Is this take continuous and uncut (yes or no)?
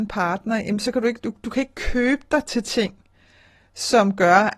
yes